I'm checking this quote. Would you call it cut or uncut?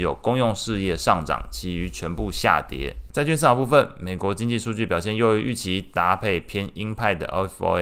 cut